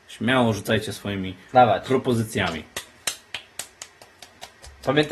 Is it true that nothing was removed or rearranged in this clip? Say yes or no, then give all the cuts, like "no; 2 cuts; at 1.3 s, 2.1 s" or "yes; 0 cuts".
yes; 0 cuts